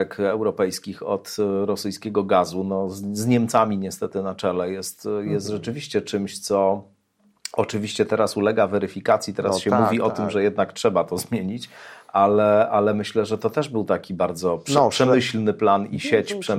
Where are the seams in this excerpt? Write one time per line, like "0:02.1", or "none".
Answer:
none